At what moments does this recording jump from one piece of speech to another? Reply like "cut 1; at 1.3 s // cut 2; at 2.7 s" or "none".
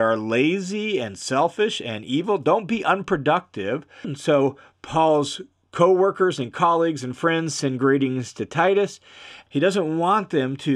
cut 1; at 4.0 s // cut 2; at 9.5 s